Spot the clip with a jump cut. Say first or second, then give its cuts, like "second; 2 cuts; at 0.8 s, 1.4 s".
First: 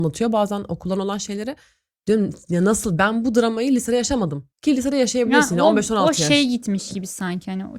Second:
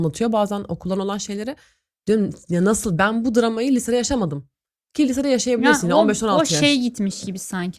first; 1 cut; at 4.5 s